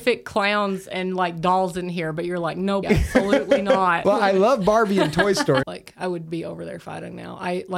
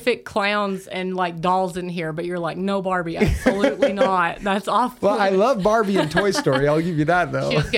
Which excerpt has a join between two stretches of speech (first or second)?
first